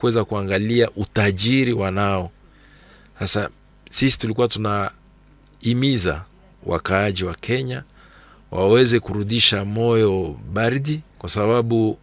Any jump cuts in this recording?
yes; 1 cut; at 11.1 s

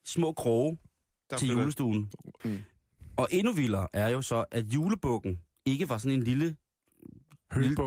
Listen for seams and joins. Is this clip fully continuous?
no; 1 cut; at 2.4 s

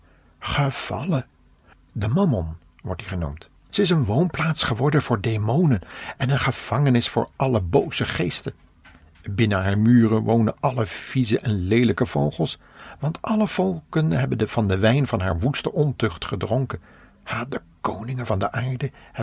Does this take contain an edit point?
yes; 2 cuts; at 1.7 s, 3.7 s

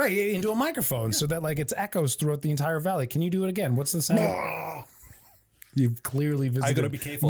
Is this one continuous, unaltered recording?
yes; 0 cuts

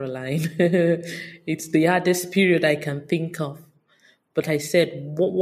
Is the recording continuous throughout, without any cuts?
no; 1 cut; at 4.4 s

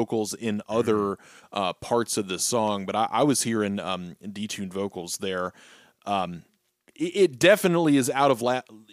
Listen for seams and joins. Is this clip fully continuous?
yes; 0 cuts

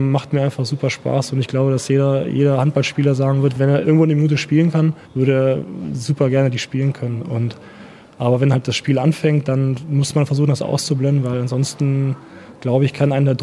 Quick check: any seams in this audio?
yes; 1 cut; at 5.0 s

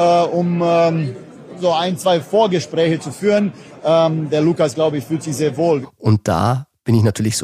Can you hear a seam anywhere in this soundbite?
yes; 1 cut; at 5.8 s

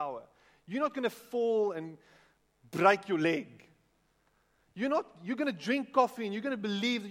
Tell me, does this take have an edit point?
no; 0 cuts

